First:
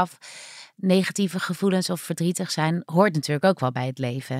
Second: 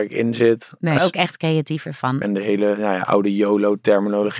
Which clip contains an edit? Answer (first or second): second